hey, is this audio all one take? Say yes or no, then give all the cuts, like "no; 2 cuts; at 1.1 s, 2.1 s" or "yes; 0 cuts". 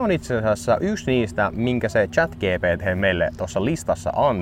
yes; 0 cuts